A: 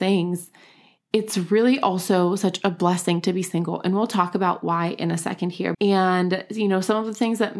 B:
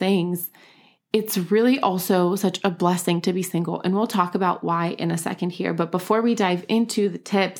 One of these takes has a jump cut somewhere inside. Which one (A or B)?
A